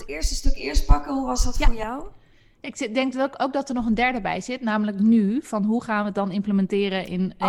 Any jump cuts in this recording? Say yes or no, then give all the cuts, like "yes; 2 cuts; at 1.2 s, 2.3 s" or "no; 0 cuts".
no; 0 cuts